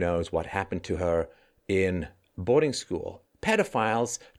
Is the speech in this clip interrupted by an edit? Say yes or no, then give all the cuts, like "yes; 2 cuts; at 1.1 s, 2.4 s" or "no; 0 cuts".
yes; 1 cut; at 3.2 s